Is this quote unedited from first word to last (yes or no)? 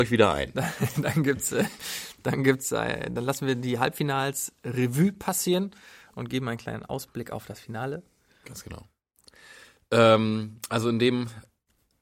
yes